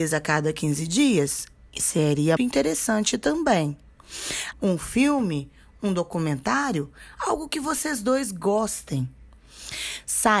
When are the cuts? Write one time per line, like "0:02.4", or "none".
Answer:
0:02.4
0:04.5